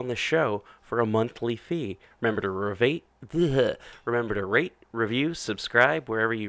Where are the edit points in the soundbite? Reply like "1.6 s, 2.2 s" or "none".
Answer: 2.1 s